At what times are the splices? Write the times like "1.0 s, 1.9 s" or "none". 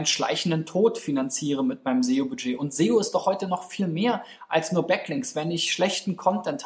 none